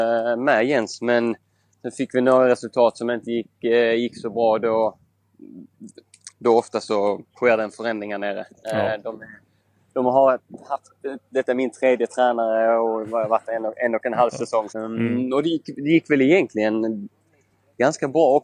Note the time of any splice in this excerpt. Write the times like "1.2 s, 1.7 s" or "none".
7.3 s, 14.7 s